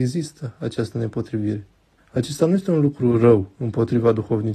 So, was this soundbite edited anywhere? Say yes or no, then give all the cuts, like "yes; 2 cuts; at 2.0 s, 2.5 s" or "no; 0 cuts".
yes; 1 cut; at 2.0 s